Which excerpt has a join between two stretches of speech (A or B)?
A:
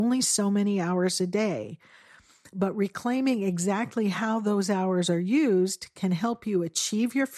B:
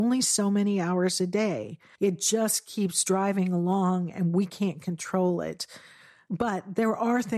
B